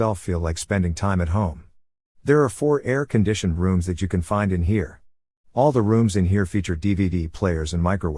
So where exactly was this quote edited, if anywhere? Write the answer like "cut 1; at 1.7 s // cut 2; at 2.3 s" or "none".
none